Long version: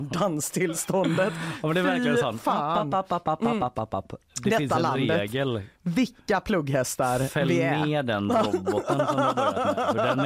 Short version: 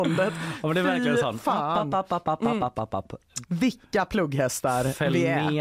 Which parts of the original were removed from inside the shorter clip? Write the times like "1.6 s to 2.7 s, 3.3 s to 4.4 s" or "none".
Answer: 4.4 s to 5.8 s